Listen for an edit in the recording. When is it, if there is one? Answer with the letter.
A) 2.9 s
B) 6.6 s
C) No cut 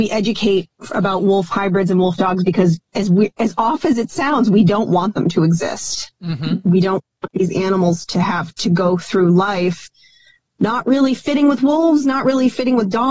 A